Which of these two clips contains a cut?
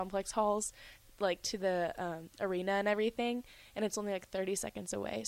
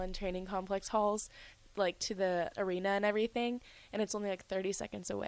second; 1 cut; at 2.5 s

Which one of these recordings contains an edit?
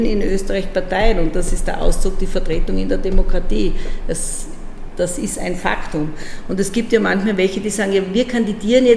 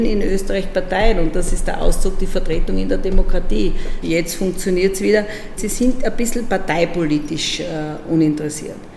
second; 2 cuts; at 4.0 s, 5.6 s

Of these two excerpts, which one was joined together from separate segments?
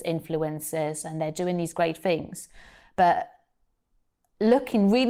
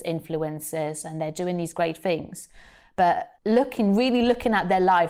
second; 1 cut; at 3.4 s

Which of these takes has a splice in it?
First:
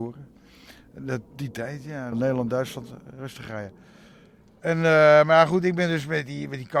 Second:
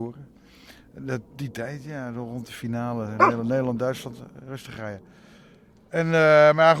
first; 1 cut; at 2.1 s

